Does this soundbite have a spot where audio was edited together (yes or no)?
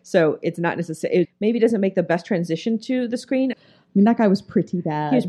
yes